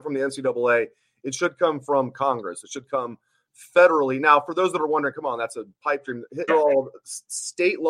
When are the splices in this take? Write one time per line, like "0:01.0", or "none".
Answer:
0:06.5